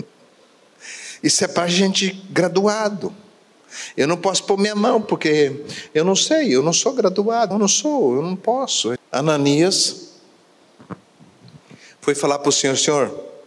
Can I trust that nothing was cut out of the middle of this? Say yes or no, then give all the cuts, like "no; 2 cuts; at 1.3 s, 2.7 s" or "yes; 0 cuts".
no; 2 cuts; at 7.5 s, 9.0 s